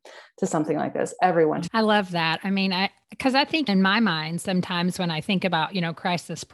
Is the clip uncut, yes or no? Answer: no